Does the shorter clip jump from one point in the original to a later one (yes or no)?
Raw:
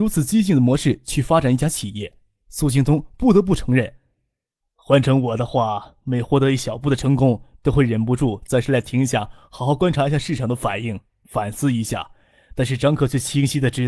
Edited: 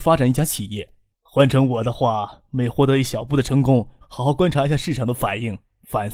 yes